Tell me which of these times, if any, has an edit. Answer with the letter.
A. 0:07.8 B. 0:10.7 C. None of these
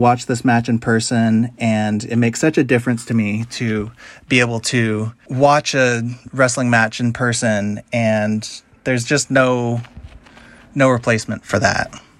C